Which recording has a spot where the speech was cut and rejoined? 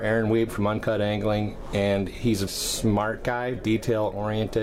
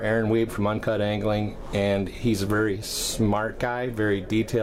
first; 2 cuts; at 2.5 s, 3.6 s

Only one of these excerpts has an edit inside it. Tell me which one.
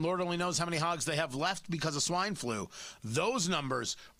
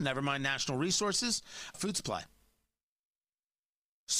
second; 1 cut; at 1.7 s

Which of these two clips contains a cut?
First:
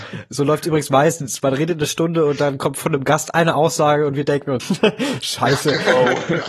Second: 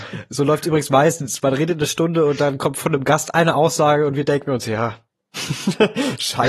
first; 1 cut; at 4.6 s

